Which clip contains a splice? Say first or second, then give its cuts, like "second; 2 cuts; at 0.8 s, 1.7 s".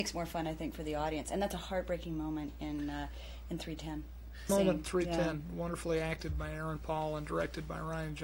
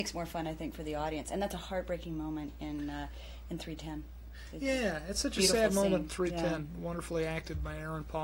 first; 1 cut; at 4.5 s